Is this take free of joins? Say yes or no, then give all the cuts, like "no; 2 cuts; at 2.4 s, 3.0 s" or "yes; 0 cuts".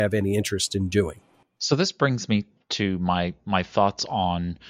yes; 0 cuts